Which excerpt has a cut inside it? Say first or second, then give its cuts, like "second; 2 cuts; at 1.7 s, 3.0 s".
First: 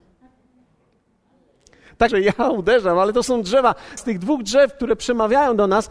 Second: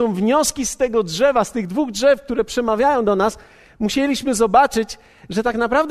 first; 2 cuts; at 2.1 s, 4.0 s